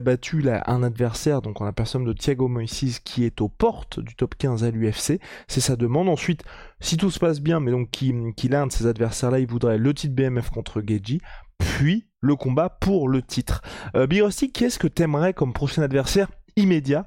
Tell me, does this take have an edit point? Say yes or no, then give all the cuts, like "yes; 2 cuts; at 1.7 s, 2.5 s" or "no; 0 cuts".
no; 0 cuts